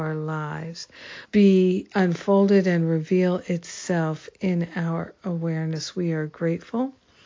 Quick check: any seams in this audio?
yes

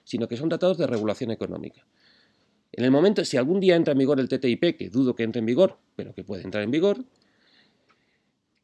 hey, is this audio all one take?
yes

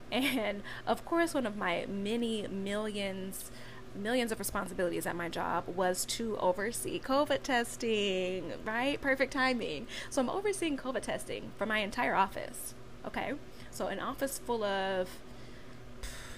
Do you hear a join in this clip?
yes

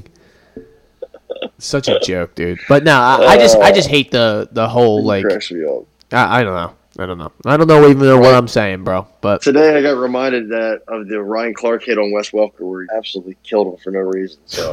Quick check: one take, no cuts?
no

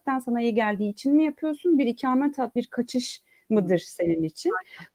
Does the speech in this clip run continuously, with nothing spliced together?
no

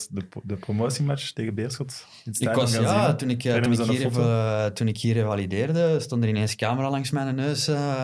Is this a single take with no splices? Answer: yes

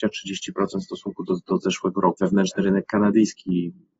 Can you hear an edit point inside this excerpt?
yes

